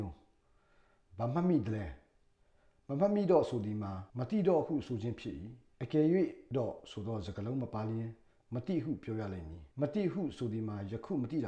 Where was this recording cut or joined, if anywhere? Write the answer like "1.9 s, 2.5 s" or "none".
4.1 s, 5.7 s, 9.7 s